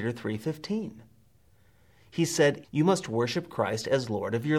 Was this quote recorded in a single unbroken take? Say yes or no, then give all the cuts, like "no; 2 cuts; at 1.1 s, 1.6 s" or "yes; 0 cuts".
no; 1 cut; at 2.6 s